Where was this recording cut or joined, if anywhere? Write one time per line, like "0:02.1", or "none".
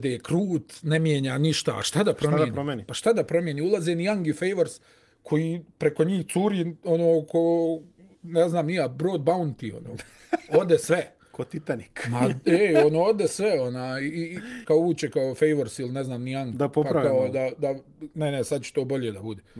0:14.6

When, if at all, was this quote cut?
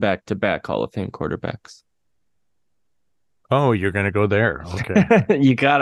none

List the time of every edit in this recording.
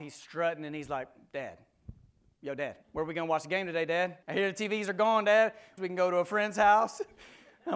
0:02.8
0:04.2
0:05.8

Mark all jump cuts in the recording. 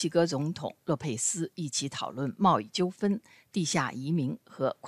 none

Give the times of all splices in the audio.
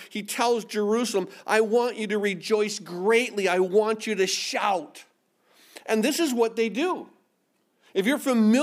none

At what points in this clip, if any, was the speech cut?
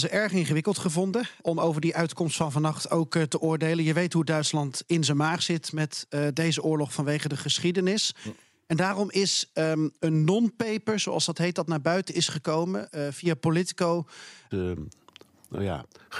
0:01.4
0:14.5

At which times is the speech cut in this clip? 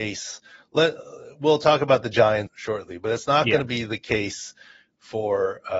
0:02.5

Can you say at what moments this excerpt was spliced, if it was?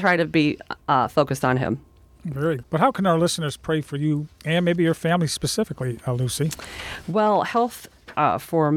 0:02.6

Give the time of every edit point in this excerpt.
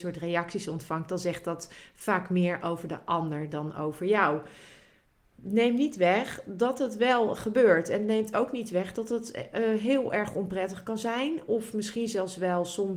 none

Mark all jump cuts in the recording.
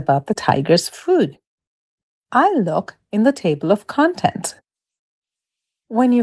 none

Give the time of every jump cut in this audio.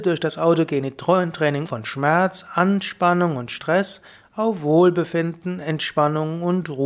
0:01.6

